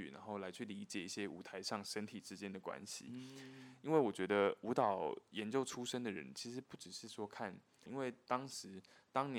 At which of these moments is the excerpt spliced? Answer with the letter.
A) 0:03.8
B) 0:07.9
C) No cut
B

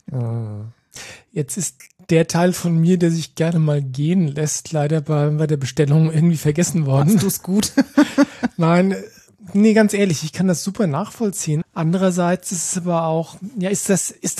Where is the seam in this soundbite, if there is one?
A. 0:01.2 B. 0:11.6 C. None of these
B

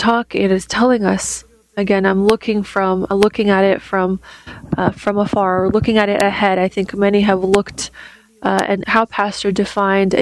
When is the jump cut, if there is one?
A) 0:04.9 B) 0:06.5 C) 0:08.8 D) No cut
C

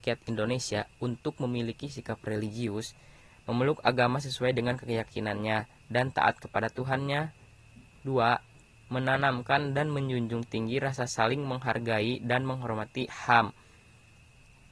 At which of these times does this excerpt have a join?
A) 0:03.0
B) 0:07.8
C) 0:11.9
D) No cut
D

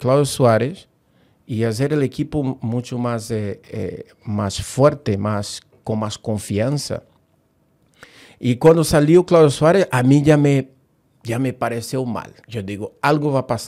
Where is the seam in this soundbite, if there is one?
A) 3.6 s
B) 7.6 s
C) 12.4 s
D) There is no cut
C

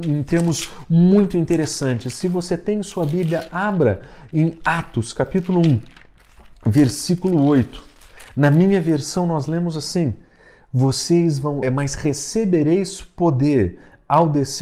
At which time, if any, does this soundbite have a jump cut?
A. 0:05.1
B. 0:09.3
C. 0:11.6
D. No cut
C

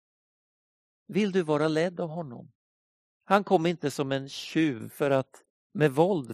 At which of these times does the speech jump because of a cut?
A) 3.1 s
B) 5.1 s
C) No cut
A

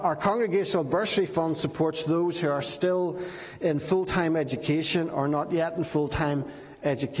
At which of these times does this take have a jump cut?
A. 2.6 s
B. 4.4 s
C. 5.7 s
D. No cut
D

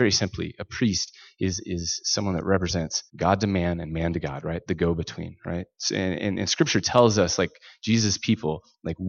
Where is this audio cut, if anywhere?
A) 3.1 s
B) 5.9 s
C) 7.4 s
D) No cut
A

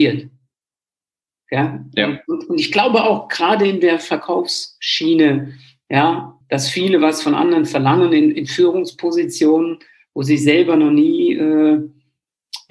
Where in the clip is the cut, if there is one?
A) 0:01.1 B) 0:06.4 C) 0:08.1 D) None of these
B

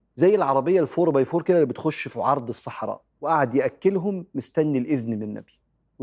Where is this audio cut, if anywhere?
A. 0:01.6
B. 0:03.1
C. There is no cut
B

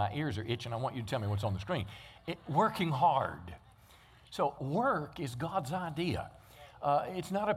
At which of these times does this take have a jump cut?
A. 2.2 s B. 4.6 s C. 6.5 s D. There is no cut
B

